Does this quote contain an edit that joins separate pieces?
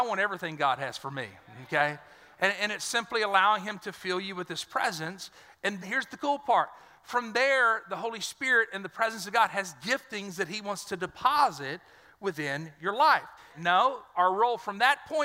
yes; 2 cuts; at 5.8 s, 13.5 s

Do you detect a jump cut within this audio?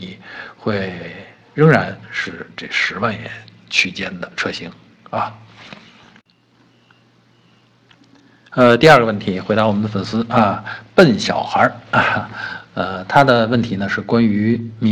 no; 0 cuts

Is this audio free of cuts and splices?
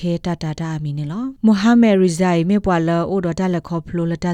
no; 1 cut; at 1.4 s

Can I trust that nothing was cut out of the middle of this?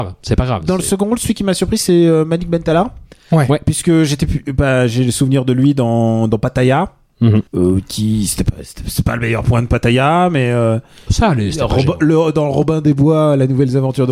no; 1 cut; at 7.5 s

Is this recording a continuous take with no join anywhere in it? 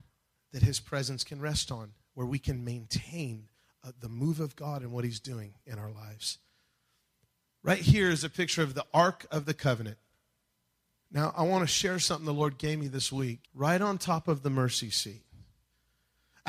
no; 2 cuts; at 11.0 s, 13.4 s

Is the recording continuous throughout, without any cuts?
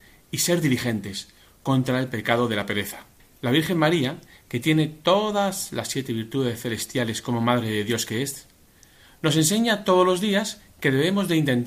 no; 1 cut; at 3.3 s

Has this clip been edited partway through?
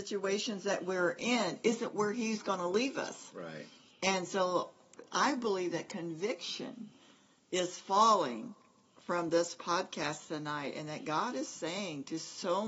no; 0 cuts

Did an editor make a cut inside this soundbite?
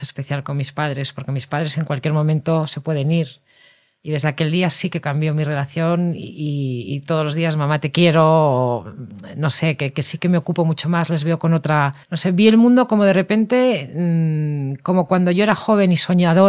yes; 1 cut; at 12.0 s

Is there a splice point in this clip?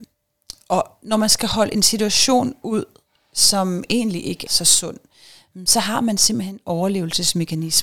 yes; 1 cut; at 4.5 s

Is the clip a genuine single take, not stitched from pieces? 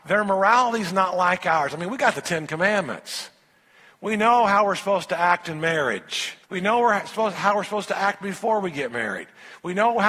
no; 1 cut; at 6.4 s

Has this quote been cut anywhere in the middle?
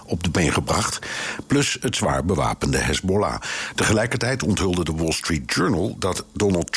yes; 2 cuts; at 1.4 s, 3.7 s

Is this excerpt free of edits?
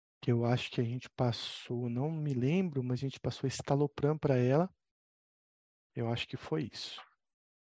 yes; 0 cuts

